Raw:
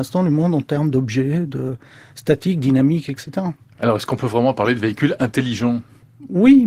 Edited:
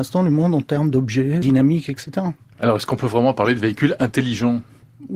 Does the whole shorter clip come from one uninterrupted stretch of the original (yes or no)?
no